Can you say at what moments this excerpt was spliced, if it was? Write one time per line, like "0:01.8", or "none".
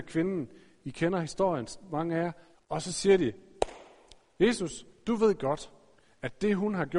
0:02.5

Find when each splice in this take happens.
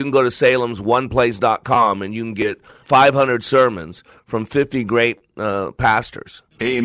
0:02.8

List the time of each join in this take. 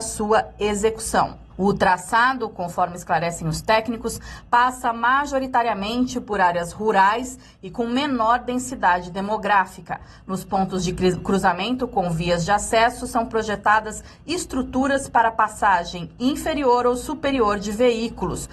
0:01.5

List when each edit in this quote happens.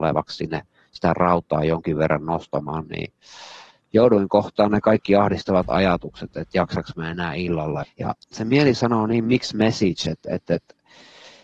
0:07.8

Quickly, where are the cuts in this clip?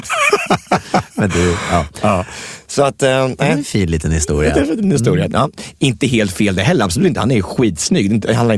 0:05.3

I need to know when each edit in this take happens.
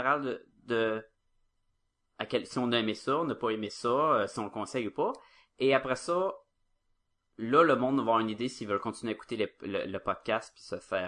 none

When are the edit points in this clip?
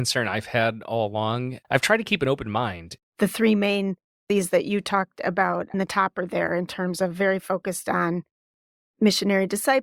0:01.6
0:03.0

